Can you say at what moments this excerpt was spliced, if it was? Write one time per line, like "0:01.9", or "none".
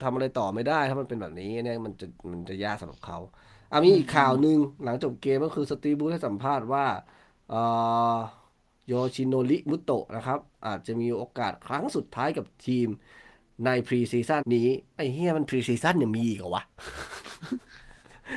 0:14.4